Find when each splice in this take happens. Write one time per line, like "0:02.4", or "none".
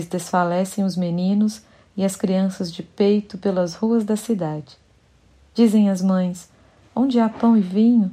none